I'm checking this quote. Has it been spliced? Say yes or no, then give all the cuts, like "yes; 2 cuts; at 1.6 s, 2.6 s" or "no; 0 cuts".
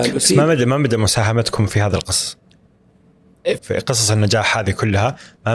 yes; 1 cut; at 3.6 s